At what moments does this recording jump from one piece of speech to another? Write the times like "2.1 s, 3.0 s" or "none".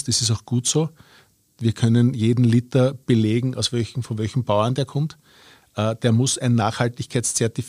none